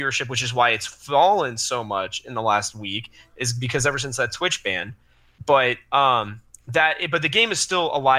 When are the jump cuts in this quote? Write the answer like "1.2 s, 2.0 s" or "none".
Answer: none

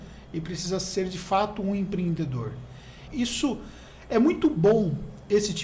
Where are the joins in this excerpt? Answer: 3.1 s

